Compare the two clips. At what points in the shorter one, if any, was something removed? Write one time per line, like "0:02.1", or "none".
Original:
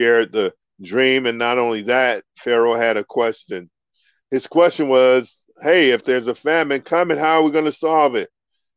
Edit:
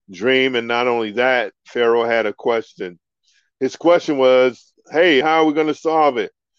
0:05.2